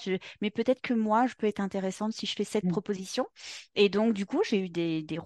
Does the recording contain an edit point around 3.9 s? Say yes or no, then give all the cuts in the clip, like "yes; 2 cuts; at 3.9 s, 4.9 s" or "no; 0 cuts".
no; 0 cuts